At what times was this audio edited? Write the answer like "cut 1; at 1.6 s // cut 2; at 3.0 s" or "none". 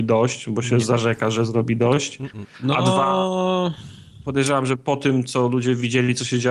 none